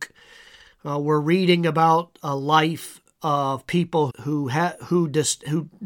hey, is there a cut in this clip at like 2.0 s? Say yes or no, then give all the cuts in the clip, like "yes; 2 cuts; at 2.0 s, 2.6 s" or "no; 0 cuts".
no; 1 cut; at 4.1 s